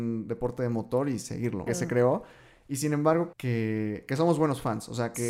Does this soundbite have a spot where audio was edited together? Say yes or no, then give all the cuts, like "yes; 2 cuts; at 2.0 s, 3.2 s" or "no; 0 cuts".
yes; 2 cuts; at 1.7 s, 3.3 s